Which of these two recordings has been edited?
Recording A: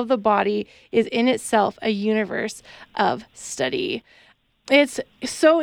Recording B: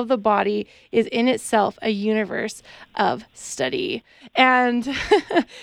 B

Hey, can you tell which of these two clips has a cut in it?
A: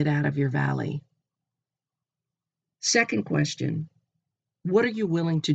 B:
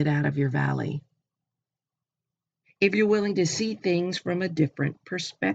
B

